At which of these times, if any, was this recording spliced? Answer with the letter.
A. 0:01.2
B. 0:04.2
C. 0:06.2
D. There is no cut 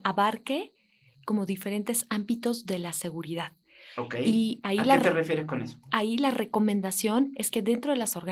D